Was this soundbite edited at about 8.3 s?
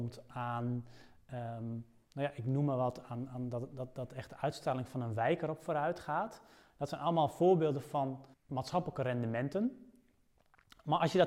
yes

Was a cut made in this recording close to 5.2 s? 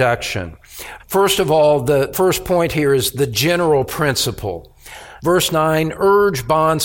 yes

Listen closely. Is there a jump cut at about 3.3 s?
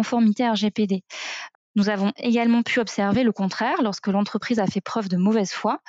no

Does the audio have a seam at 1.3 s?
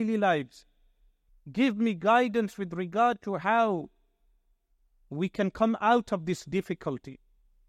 yes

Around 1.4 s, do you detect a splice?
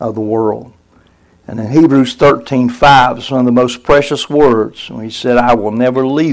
no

